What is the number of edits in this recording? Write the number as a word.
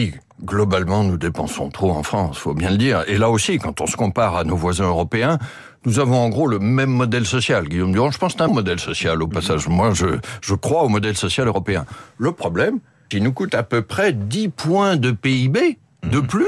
two